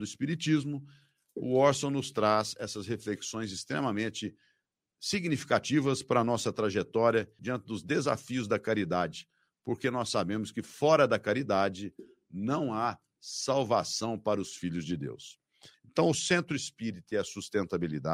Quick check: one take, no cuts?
no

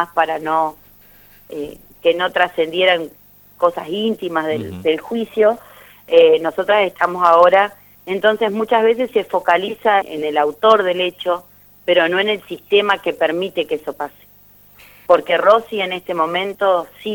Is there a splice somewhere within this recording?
yes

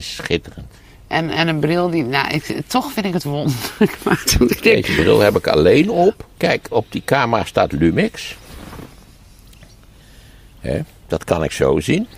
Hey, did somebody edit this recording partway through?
yes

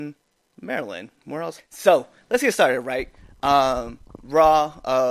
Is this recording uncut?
no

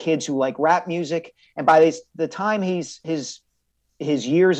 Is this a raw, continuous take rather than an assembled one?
yes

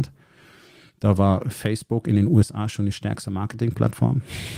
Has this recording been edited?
no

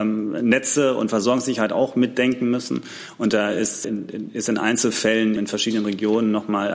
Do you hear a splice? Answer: yes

